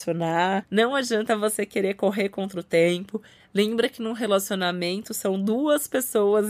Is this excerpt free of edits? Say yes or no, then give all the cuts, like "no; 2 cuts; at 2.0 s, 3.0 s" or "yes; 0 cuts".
yes; 0 cuts